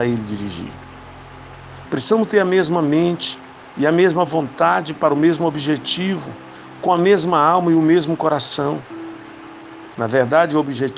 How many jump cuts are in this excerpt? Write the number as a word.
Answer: two